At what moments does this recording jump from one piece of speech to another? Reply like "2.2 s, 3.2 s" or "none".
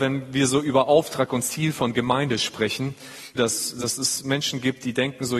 3.4 s